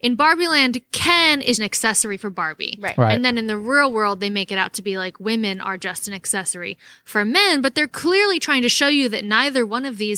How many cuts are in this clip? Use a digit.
1